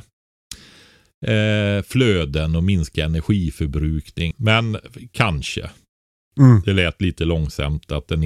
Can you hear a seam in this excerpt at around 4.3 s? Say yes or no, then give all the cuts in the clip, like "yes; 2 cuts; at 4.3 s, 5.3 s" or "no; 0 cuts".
yes; 1 cut; at 4.3 s